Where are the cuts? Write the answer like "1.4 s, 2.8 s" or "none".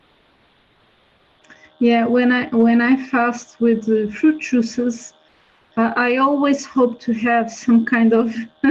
none